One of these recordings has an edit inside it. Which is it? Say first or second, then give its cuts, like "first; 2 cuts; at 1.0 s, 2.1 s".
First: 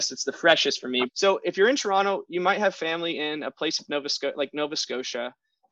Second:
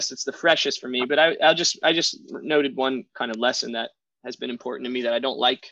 first; 1 cut; at 1.1 s